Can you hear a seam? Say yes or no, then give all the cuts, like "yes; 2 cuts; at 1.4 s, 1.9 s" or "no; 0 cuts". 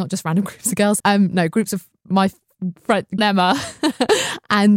yes; 2 cuts; at 1.0 s, 3.2 s